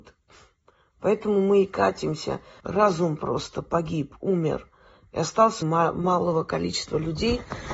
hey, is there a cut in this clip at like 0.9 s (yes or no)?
no